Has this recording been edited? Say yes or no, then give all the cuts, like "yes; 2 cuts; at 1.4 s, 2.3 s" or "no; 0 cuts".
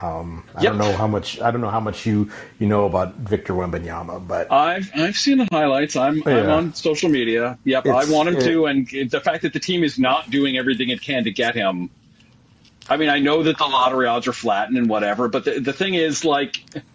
no; 0 cuts